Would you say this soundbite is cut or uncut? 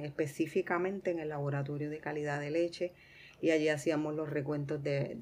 uncut